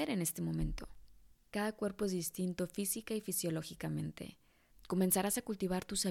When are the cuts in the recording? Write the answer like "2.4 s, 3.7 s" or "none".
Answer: 1.3 s, 4.7 s